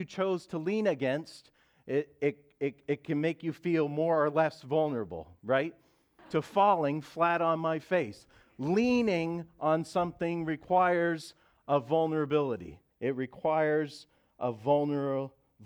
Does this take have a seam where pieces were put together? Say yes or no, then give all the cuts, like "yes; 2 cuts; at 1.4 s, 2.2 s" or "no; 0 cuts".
yes; 2 cuts; at 6.2 s, 12.9 s